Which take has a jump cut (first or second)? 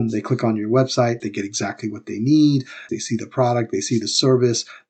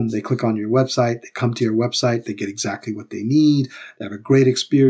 first